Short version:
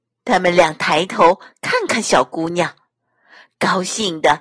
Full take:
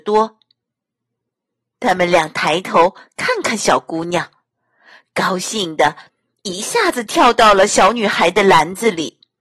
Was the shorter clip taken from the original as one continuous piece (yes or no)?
yes